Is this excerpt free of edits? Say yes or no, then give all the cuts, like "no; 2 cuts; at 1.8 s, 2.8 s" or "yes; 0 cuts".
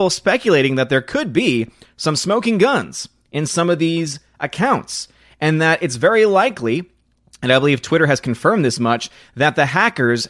yes; 0 cuts